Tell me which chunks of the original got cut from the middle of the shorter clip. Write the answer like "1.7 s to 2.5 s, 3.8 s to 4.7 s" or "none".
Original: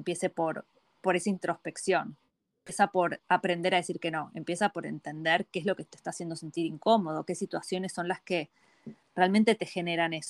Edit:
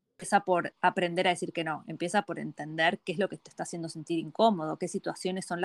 none